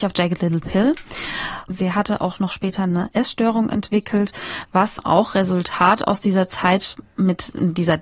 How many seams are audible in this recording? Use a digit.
2